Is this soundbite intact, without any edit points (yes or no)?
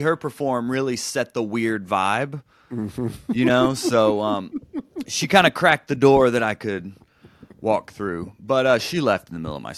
yes